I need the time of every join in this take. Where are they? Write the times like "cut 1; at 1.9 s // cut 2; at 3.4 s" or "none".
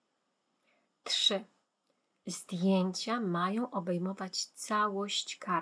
none